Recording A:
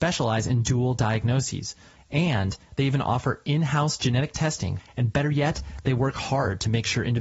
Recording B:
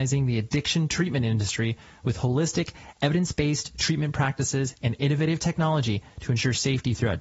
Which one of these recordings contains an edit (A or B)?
A